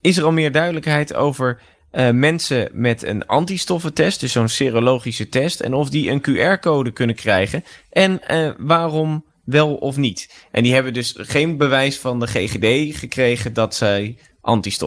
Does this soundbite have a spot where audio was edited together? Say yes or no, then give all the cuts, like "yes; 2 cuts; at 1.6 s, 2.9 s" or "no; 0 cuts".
no; 0 cuts